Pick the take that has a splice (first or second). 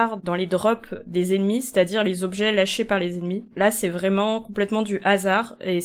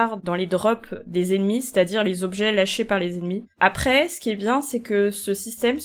second